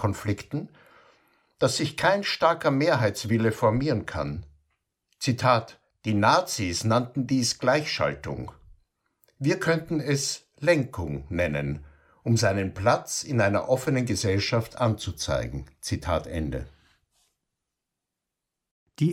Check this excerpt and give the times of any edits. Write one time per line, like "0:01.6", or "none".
none